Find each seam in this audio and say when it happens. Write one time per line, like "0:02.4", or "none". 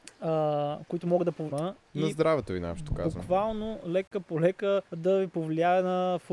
0:01.5
0:04.9